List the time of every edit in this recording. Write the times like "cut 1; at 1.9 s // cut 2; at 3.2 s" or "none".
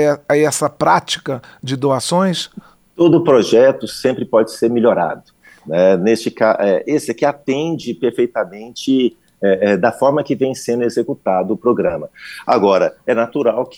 none